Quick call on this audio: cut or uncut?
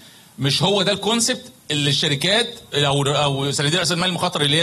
uncut